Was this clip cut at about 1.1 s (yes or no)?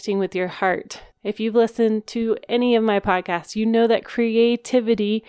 yes